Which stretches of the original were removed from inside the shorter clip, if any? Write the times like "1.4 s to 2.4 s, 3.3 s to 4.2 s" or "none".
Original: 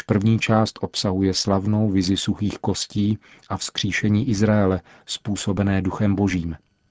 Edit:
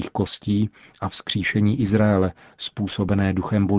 none